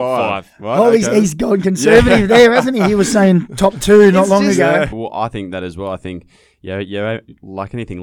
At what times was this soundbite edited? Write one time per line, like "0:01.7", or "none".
0:04.9